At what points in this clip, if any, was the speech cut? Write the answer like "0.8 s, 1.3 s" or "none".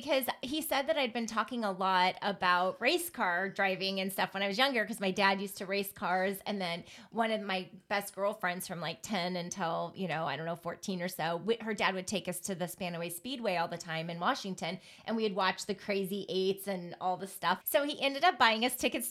17.6 s